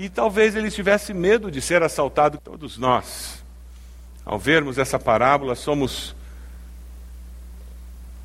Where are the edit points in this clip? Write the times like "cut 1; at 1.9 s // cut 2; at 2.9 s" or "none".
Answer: cut 1; at 2.4 s